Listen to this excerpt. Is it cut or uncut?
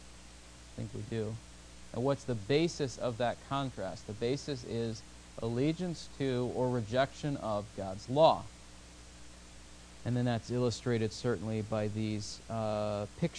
uncut